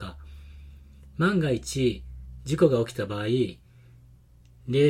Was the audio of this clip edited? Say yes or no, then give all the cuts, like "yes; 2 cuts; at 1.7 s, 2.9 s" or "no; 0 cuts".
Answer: no; 0 cuts